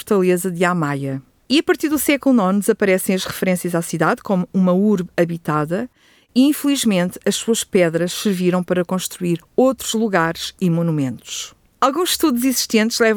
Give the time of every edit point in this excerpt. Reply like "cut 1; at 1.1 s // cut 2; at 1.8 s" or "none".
cut 1; at 1.4 s // cut 2; at 11.7 s